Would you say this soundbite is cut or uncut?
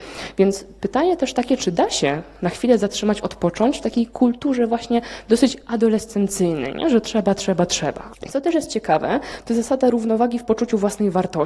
cut